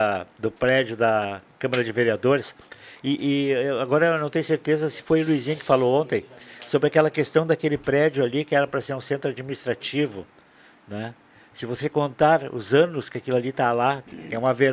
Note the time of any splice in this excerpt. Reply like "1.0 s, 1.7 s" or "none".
none